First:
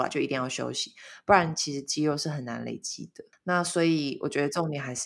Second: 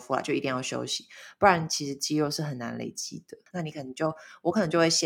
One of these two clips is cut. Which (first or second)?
second